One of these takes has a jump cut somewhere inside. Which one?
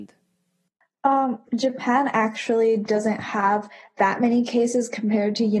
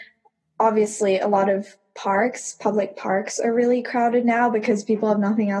first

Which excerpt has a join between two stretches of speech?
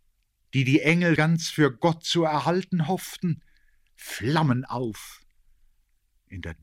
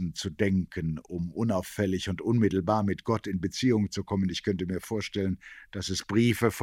first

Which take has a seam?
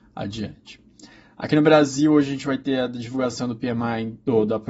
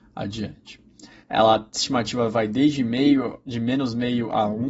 second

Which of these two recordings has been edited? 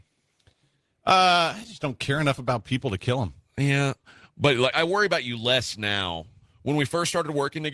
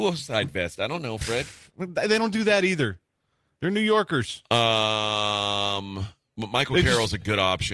first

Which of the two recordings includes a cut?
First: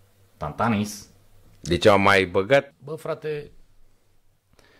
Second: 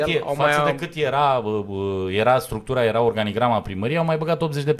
first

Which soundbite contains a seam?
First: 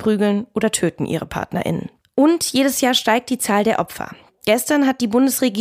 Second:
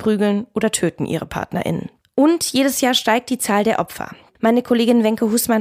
second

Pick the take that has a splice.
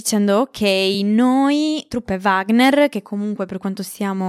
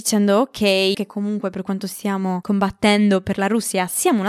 second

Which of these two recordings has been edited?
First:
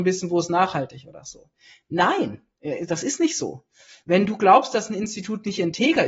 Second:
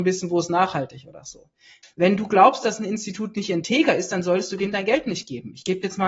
second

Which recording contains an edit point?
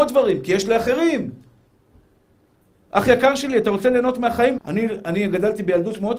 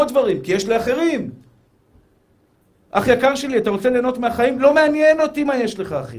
first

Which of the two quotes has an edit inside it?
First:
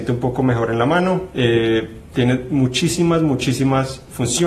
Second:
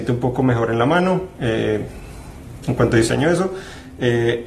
first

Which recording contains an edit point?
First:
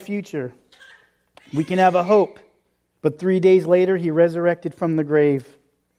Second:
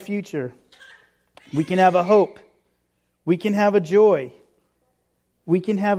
first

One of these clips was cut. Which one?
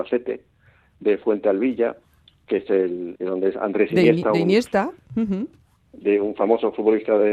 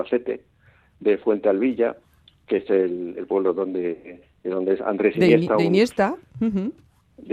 first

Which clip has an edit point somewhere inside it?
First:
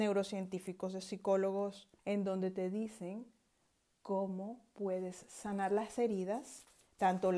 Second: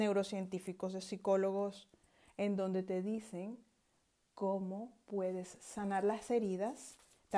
first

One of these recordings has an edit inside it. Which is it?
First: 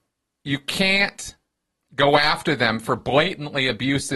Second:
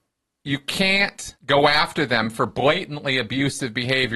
second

